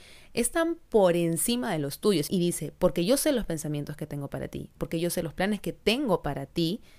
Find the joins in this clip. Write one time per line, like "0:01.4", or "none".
0:02.3
0:04.8